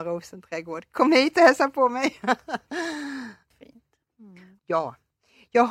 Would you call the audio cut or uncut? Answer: cut